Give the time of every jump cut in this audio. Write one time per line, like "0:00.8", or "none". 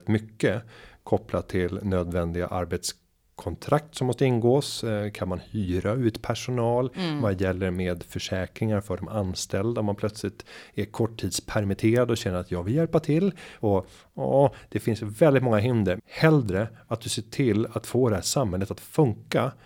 0:13.6
0:16.0